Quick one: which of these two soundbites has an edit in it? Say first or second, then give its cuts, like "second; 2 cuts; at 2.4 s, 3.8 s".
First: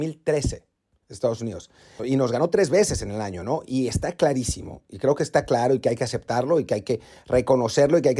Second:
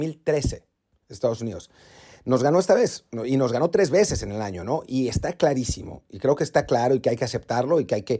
first; 1 cut; at 2.0 s